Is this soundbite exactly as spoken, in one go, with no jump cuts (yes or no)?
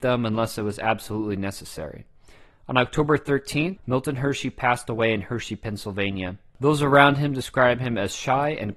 no